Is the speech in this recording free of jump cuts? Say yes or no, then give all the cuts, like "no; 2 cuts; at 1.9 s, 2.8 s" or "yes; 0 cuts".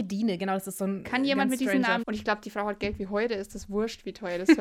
no; 1 cut; at 2.0 s